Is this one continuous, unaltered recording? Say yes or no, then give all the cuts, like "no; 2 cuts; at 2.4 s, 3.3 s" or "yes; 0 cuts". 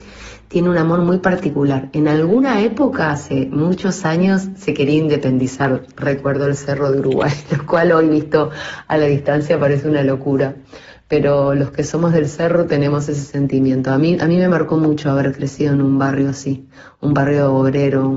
yes; 0 cuts